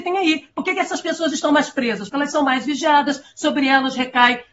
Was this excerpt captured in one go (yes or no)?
yes